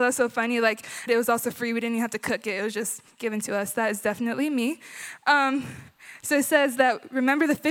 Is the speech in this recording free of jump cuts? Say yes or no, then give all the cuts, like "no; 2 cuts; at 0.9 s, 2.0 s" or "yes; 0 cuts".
no; 1 cut; at 1.1 s